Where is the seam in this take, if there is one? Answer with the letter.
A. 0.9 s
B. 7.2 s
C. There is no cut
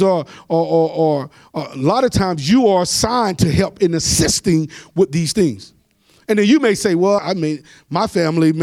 B